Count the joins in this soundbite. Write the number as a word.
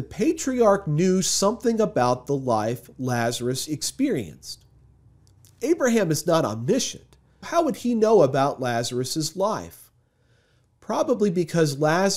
one